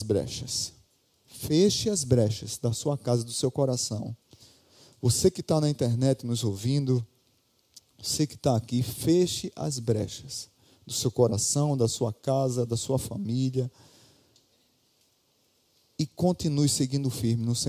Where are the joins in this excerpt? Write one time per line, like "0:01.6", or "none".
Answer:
none